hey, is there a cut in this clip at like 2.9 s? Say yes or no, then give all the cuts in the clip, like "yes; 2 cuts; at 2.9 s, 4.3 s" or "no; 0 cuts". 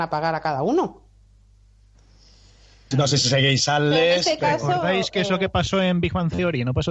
yes; 1 cut; at 2.9 s